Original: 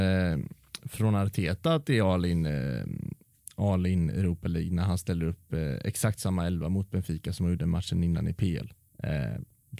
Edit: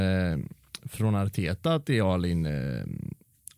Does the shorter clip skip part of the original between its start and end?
no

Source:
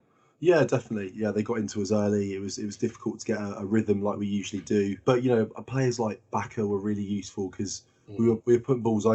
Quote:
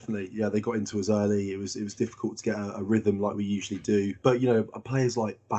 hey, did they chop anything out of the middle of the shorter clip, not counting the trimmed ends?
no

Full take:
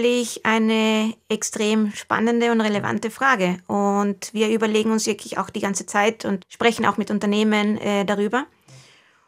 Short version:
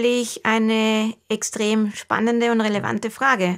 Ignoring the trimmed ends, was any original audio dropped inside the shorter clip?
no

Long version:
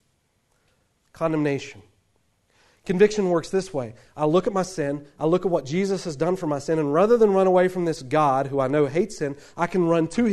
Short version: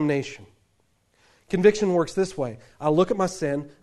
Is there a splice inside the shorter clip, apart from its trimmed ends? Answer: no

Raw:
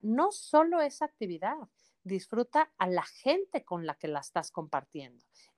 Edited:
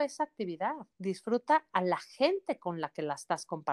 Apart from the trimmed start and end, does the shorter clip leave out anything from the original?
yes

